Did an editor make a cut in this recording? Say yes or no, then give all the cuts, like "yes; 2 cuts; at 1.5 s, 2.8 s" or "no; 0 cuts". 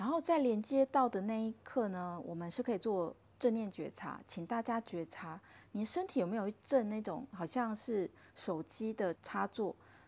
yes; 1 cut; at 9.2 s